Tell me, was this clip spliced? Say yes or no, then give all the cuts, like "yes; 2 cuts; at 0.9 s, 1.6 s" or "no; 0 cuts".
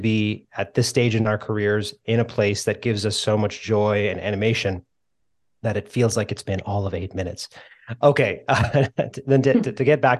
no; 0 cuts